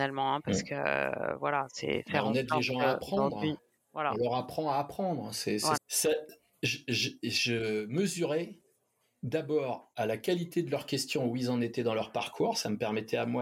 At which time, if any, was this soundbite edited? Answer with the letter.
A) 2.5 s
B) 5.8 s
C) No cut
B